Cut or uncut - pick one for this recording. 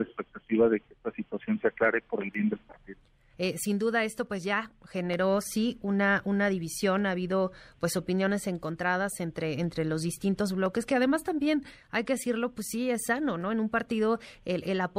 cut